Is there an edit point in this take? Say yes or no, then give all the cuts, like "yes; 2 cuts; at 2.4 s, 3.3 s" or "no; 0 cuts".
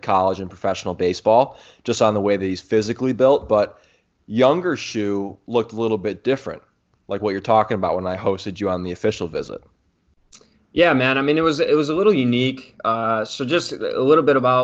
no; 0 cuts